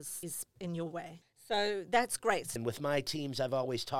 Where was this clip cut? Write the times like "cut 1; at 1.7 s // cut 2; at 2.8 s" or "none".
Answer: cut 1; at 2.6 s